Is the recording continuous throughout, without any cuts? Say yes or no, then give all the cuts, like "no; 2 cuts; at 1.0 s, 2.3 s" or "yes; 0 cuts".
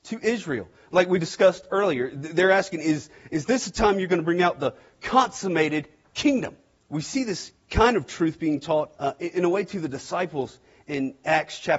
no; 2 cuts; at 6.8 s, 8.9 s